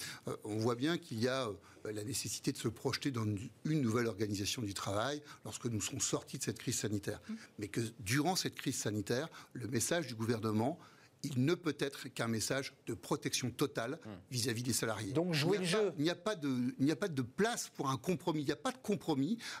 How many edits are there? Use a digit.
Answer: 0